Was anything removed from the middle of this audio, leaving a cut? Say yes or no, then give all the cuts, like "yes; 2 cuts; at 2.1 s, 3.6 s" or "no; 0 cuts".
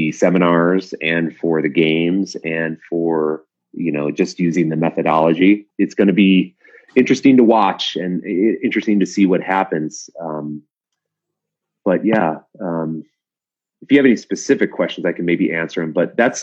yes; 1 cut; at 5.7 s